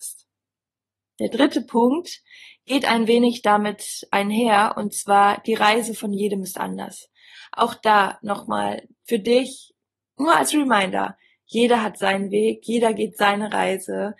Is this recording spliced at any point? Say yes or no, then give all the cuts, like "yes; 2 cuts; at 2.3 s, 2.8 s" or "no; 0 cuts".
no; 0 cuts